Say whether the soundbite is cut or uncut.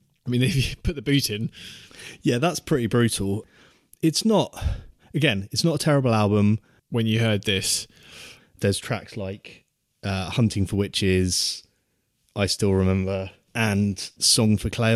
cut